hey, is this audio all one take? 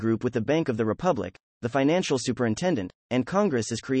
no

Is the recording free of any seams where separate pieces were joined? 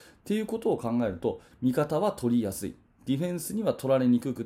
no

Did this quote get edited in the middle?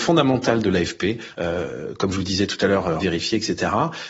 yes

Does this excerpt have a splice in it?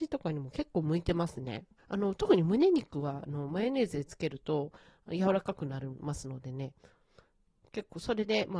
yes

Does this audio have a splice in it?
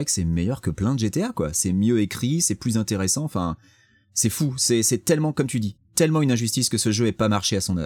no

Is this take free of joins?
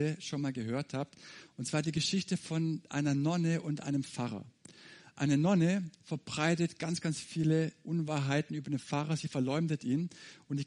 yes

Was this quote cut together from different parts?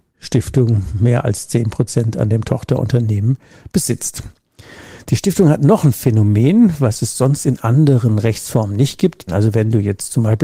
yes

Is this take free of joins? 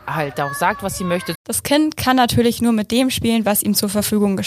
no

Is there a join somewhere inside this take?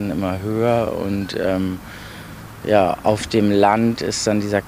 no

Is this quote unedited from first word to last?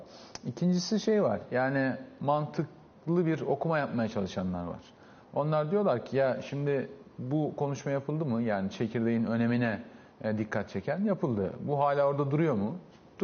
yes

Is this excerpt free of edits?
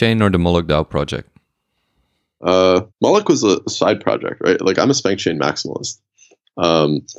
no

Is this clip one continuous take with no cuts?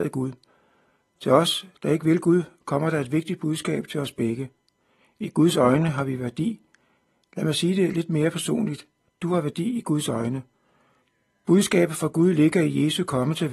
yes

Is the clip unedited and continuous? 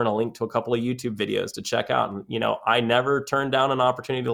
yes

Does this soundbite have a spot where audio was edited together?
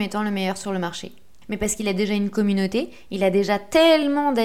yes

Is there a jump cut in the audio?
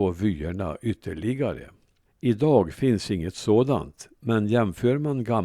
yes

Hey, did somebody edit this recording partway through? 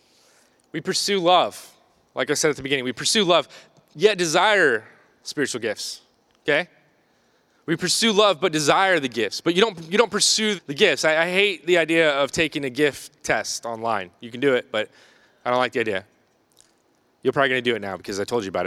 yes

